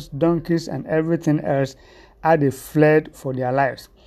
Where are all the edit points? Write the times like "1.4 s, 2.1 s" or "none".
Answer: none

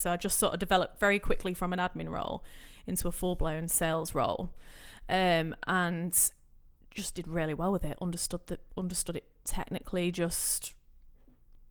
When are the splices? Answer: none

